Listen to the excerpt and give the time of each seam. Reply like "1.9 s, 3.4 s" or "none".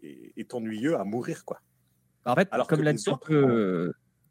none